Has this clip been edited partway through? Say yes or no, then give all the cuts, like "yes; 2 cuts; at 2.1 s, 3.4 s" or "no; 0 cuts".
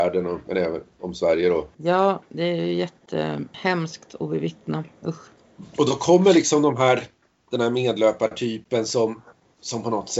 no; 0 cuts